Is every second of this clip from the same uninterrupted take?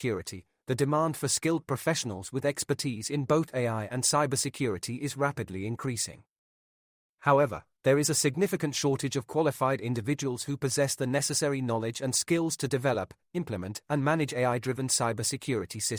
yes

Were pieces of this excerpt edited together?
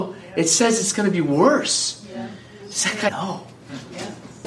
yes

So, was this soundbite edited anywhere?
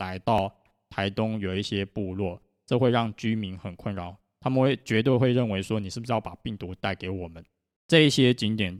yes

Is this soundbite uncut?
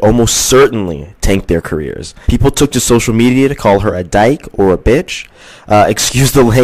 no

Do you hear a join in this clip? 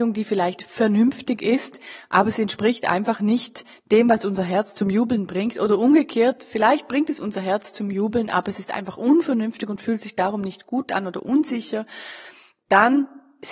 no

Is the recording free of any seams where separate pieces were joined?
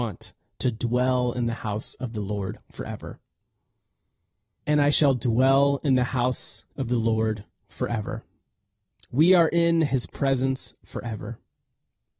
no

